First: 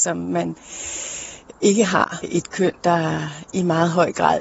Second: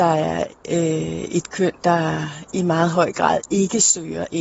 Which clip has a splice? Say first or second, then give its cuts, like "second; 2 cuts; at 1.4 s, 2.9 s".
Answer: first; 1 cut; at 2.2 s